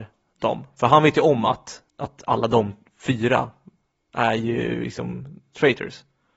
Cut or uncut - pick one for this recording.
cut